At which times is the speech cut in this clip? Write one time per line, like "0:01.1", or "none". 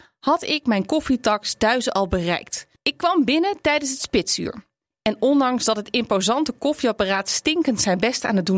0:02.8